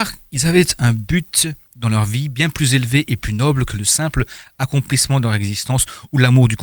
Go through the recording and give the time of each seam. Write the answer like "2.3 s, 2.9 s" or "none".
none

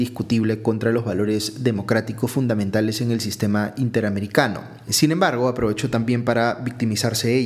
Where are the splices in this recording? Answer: 4.9 s

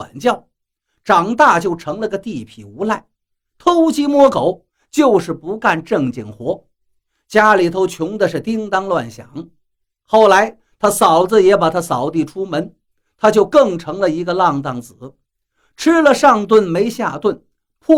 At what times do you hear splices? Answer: none

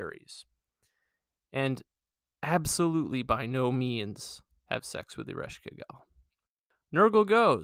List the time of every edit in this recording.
none

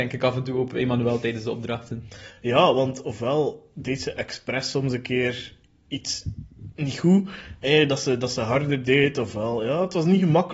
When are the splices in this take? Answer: none

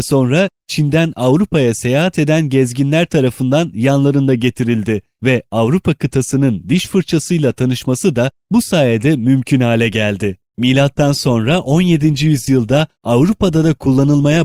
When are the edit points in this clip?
none

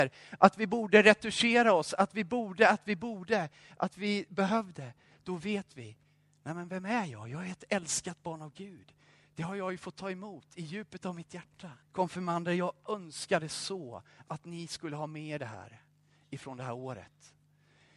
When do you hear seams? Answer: 11.8 s

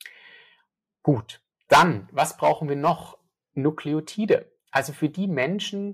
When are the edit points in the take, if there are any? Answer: none

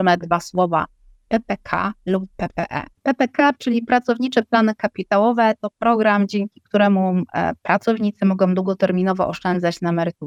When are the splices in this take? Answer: none

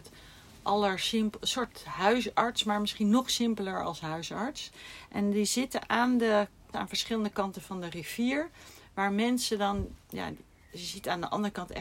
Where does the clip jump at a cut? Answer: 6.7 s

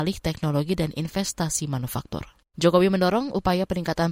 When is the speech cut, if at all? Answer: 2.5 s

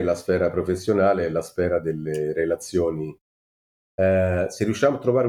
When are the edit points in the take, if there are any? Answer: none

